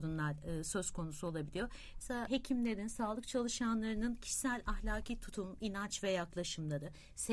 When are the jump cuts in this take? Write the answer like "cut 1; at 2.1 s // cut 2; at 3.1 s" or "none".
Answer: cut 1; at 1.9 s